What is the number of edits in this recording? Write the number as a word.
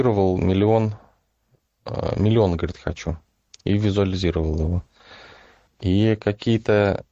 one